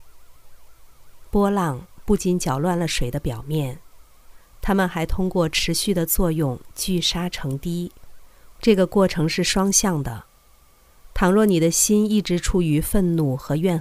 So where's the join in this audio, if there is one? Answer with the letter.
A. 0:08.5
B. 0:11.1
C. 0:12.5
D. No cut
A